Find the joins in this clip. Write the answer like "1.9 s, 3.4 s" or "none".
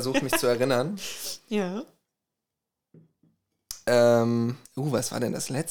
4.7 s